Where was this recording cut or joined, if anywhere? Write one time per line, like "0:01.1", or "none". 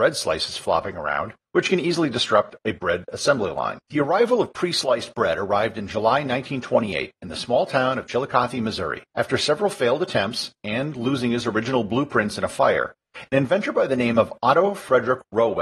0:03.8
0:09.1